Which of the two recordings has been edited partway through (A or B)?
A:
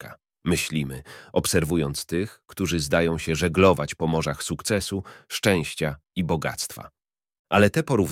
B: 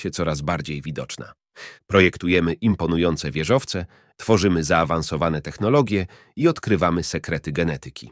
B